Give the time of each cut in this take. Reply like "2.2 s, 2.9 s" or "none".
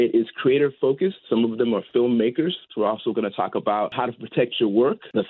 1.3 s, 2.7 s